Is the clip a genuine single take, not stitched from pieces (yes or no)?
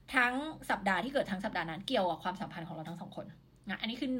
yes